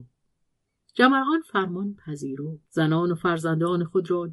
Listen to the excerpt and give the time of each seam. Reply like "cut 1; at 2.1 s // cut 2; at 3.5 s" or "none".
cut 1; at 2.7 s

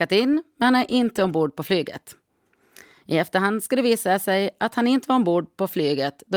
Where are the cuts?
none

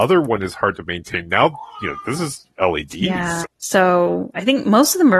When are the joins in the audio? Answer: cut 1; at 3.4 s

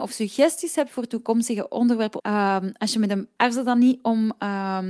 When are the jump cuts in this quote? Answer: cut 1; at 2.2 s // cut 2; at 3.4 s

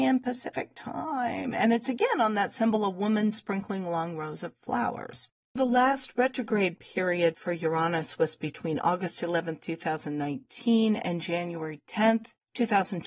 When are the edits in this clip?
cut 1; at 5.6 s

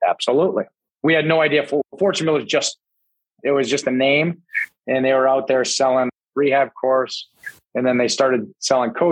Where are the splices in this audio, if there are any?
cut 1; at 6.3 s

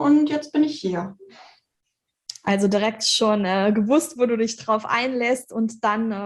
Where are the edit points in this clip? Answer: none

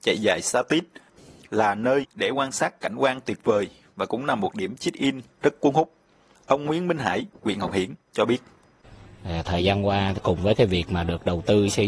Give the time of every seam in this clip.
cut 1; at 7.3 s

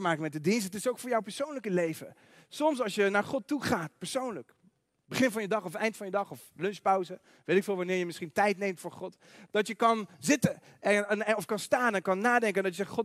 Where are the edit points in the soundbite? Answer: none

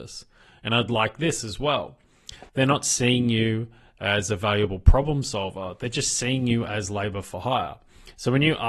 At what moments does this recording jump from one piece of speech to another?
cut 1; at 2.5 s

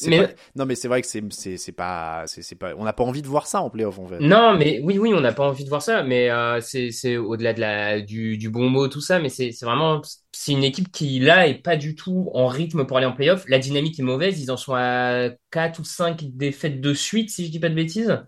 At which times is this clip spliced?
none

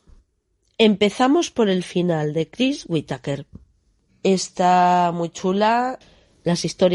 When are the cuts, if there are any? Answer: cut 1; at 4.1 s

